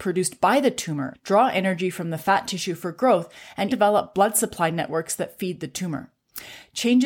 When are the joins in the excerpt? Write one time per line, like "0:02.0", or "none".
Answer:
0:01.1
0:03.7